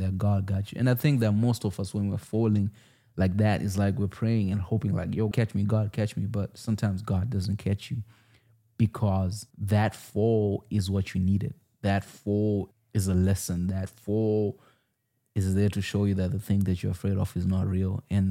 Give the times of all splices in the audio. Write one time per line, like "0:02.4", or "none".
0:05.3
0:09.5
0:12.7